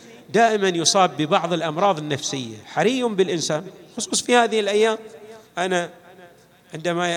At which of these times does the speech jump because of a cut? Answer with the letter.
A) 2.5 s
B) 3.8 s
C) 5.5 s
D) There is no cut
C